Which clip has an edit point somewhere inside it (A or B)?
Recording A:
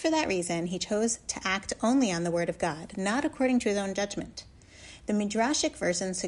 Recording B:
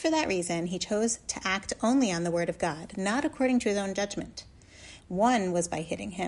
B